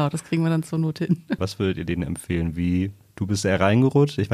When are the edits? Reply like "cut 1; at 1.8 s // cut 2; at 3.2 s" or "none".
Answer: cut 1; at 1.4 s